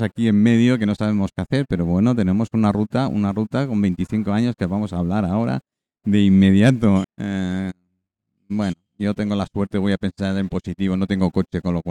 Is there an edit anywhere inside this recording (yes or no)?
yes